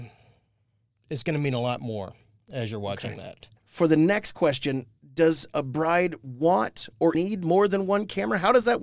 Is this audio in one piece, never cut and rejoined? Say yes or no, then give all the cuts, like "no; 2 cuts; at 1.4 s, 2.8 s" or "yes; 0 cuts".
no; 2 cuts; at 3.6 s, 7.1 s